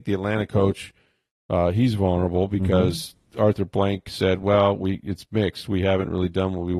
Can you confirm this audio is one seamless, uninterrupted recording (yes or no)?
yes